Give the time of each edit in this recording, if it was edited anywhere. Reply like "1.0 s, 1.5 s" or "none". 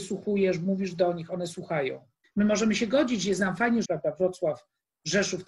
2.2 s, 3.8 s